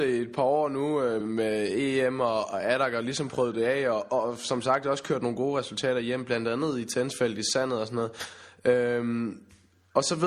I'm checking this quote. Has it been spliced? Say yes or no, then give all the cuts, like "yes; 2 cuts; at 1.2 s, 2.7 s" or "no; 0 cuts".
yes; 1 cut; at 1.2 s